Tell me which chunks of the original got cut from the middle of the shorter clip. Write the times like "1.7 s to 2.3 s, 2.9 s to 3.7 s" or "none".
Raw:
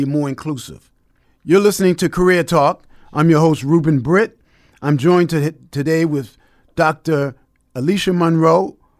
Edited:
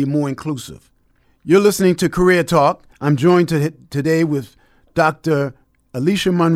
2.9 s to 4.7 s